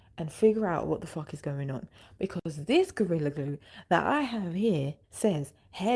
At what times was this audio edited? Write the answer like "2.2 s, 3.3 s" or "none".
5.0 s